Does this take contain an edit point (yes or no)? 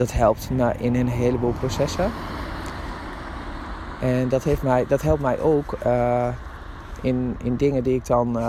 no